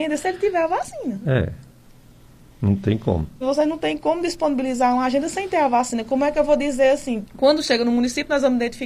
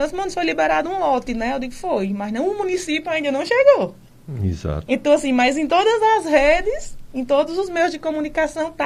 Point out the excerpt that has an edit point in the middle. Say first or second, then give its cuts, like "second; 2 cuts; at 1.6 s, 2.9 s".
first; 2 cuts; at 3.4 s, 7.2 s